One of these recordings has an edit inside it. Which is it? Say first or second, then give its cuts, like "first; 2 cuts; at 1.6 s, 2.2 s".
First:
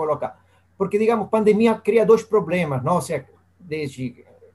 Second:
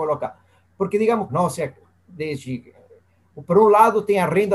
second; 1 cut; at 1.3 s